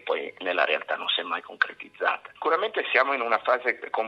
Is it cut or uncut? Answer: cut